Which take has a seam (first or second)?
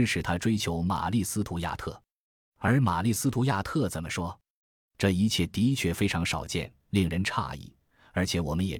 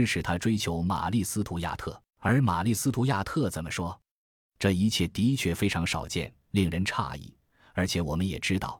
second